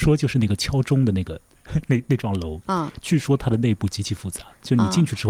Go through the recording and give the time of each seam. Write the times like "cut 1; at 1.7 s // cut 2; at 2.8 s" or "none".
none